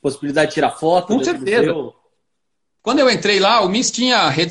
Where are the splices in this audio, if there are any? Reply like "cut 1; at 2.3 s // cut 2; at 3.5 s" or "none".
cut 1; at 2.8 s